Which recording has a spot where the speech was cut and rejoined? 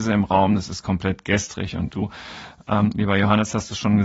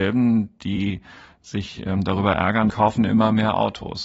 second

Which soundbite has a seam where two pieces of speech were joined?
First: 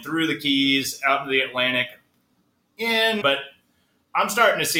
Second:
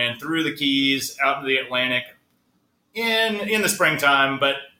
first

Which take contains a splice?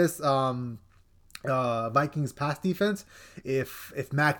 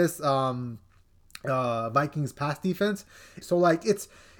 second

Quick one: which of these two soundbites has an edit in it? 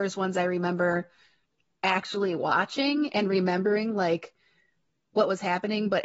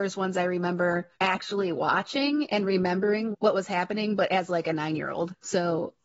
second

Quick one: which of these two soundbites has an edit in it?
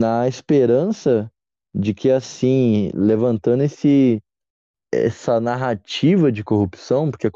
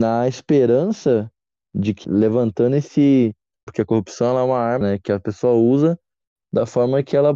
second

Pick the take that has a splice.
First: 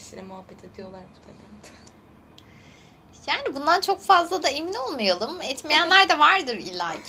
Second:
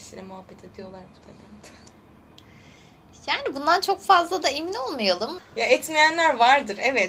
second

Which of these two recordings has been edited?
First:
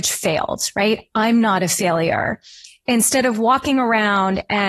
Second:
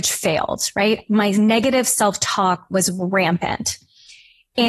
second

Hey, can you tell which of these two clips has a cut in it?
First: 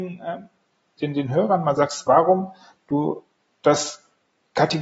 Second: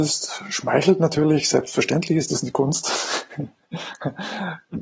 first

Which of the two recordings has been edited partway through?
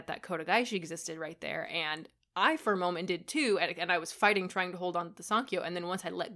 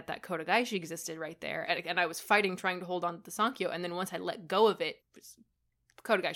second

